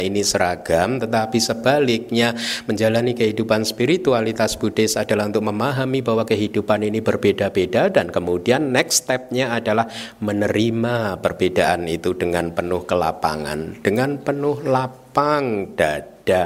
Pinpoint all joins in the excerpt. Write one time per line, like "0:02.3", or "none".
none